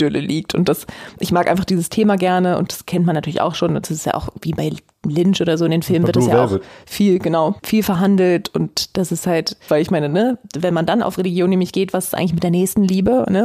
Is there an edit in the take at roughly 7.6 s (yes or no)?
yes